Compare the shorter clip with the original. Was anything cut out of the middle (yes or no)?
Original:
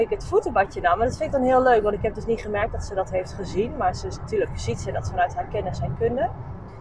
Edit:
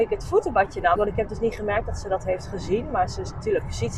yes